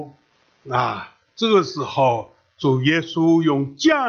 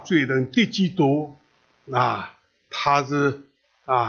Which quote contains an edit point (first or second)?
first